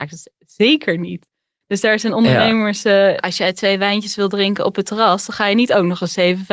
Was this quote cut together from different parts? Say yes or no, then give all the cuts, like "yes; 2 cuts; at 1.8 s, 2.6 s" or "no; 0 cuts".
yes; 1 cut; at 3.2 s